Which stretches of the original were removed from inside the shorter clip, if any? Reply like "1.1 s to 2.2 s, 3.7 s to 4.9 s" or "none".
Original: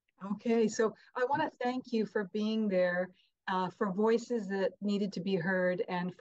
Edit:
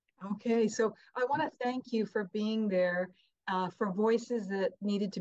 none